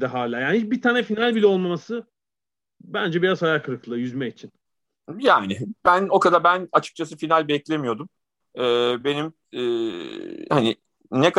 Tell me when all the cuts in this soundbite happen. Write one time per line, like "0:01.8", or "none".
none